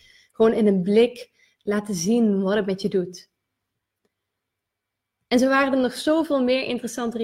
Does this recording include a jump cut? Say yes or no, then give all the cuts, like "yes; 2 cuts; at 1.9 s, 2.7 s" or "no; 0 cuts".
no; 0 cuts